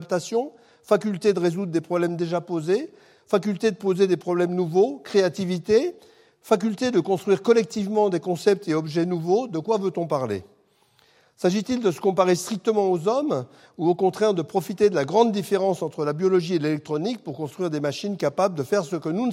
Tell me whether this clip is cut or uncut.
uncut